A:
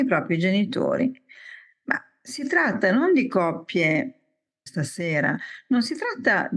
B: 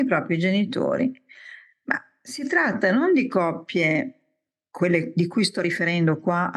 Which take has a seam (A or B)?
A